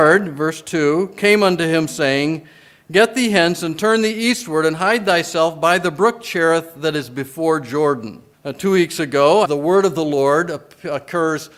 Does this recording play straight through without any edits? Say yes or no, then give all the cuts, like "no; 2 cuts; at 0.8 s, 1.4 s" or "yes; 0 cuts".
no; 2 cuts; at 8.3 s, 9.4 s